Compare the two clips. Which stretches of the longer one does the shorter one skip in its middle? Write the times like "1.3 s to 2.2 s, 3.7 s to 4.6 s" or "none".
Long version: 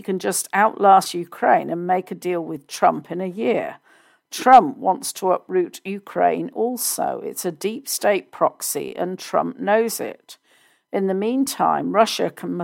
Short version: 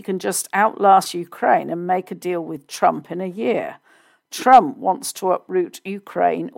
none